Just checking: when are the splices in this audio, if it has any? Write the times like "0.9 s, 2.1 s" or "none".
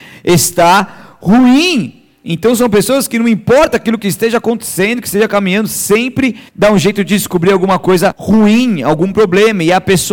6.5 s, 8.1 s